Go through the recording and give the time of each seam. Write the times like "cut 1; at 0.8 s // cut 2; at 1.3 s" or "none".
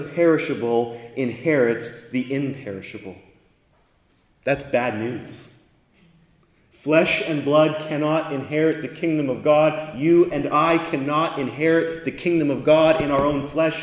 none